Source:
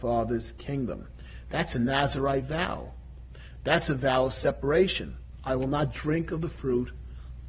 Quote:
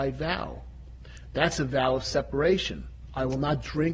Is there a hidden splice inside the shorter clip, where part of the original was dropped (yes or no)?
no